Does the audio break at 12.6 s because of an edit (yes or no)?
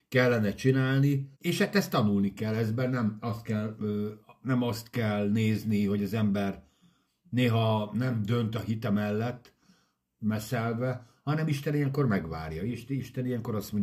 no